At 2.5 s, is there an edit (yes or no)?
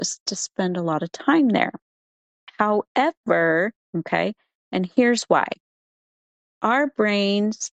no